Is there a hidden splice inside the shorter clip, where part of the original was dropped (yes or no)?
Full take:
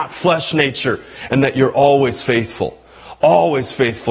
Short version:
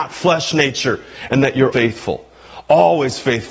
yes